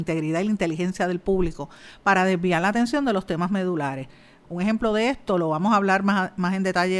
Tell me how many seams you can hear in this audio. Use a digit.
1